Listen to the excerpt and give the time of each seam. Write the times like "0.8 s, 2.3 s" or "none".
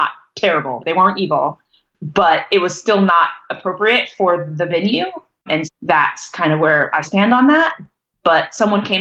5.6 s, 7.0 s